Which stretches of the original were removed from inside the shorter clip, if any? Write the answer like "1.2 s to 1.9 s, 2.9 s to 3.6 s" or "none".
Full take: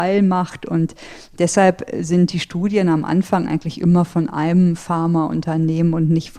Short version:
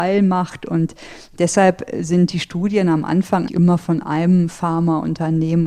3.5 s to 3.7 s